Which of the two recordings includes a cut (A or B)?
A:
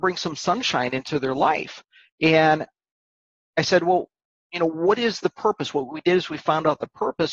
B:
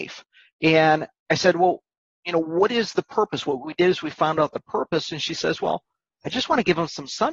B